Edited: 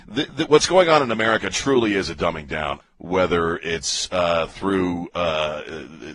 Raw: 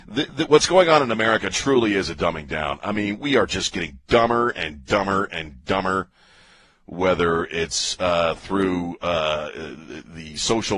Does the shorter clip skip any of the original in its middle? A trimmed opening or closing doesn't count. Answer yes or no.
yes